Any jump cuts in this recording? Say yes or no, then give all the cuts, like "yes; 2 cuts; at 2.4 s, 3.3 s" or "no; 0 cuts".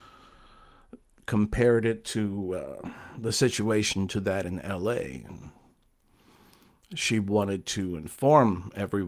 no; 0 cuts